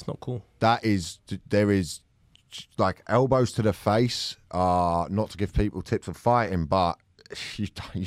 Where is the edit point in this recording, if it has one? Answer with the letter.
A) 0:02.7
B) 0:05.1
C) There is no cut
C